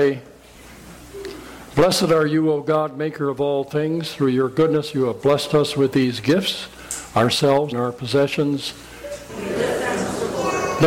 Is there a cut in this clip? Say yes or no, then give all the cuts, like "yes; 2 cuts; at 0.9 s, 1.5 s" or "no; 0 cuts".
yes; 2 cuts; at 7.7 s, 9.3 s